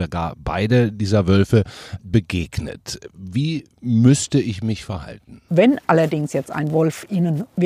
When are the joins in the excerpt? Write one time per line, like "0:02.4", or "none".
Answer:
0:02.0
0:05.5

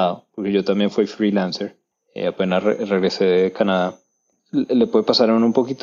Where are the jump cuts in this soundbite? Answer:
none

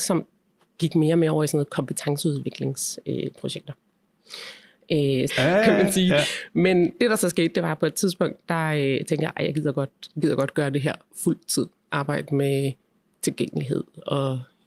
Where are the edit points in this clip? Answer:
0:05.3

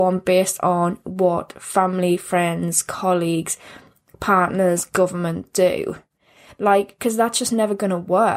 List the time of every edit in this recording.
none

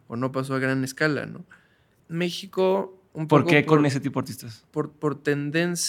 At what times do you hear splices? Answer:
0:02.0

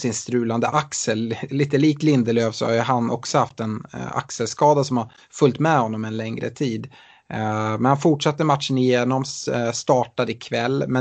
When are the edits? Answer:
none

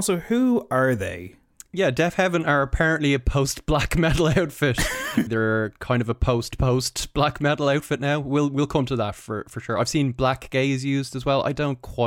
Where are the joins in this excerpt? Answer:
0:05.3

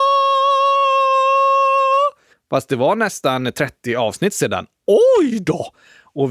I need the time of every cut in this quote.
0:02.3

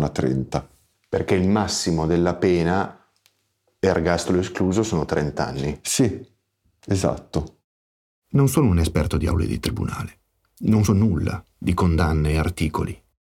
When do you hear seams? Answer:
0:10.9

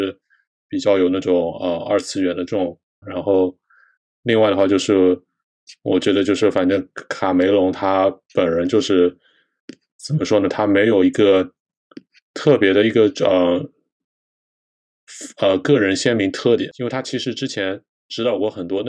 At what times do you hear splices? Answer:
0:03.0

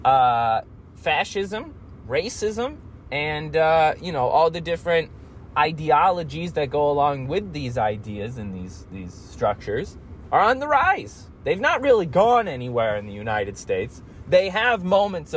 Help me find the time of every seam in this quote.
none

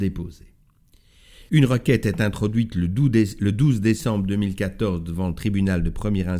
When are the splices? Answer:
0:01.5

